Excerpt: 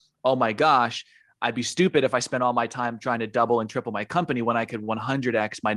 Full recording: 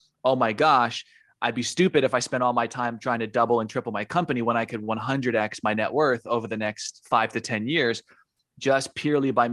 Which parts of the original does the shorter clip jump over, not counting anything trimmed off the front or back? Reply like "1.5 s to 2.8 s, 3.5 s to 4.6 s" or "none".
none